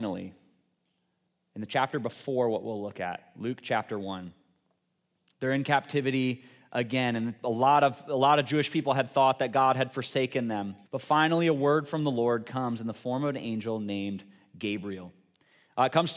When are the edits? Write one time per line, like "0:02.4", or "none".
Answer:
0:10.8